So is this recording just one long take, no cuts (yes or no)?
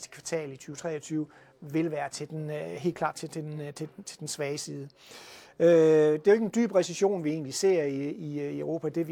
yes